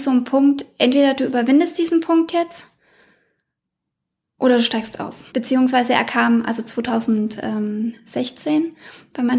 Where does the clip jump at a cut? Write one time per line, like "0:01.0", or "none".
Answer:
0:05.3